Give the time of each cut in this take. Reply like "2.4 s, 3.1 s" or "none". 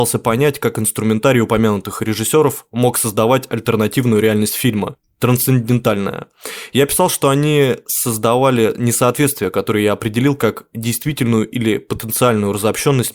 none